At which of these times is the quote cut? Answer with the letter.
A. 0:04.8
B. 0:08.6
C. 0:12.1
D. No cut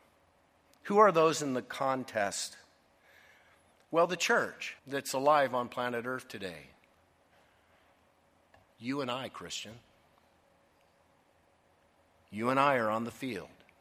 A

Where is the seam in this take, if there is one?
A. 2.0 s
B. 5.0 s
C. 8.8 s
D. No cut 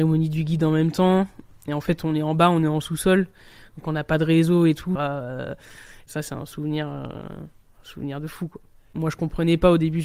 B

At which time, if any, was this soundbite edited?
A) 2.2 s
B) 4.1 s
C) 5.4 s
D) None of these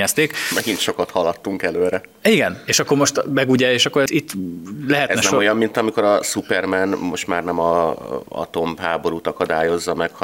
B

